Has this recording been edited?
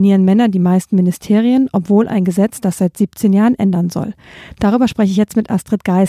no; 0 cuts

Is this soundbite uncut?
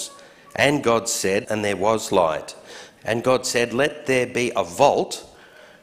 no; 2 cuts; at 1.4 s, 3.0 s

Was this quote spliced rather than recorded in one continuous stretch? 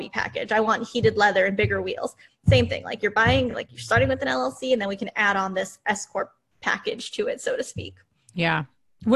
no; 0 cuts

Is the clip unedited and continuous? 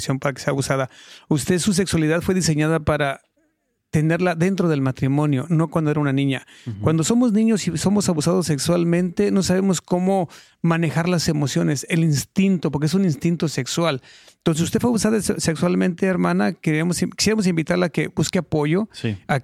yes; 0 cuts

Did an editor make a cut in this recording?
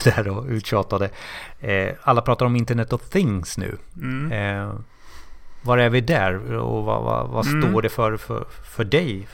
no; 0 cuts

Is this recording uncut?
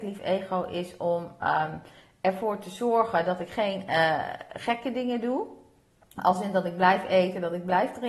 yes; 0 cuts

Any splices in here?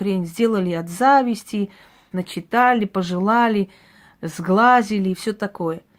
yes; 1 cut; at 2.1 s

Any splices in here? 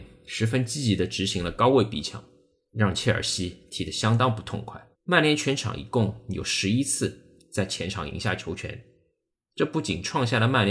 yes; 1 cut; at 4.9 s

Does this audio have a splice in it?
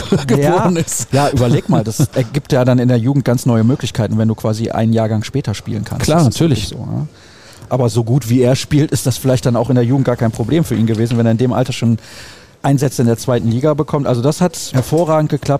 yes; 1 cut; at 14.7 s

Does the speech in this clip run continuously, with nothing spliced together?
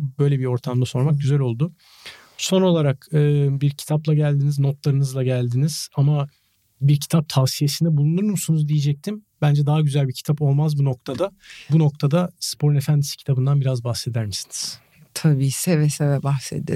yes; 0 cuts

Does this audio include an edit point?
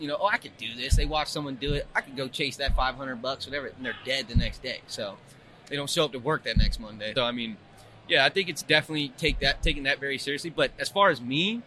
yes; 1 cut; at 7.2 s

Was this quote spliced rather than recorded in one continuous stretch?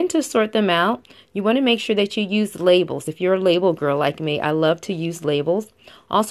no; 0 cuts

